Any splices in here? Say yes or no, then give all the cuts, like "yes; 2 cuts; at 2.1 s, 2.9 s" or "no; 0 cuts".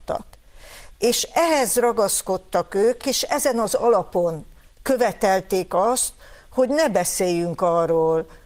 no; 0 cuts